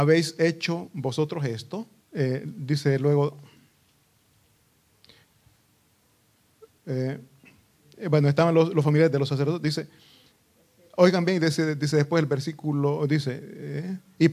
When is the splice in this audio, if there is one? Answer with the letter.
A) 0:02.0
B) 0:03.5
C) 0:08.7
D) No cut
A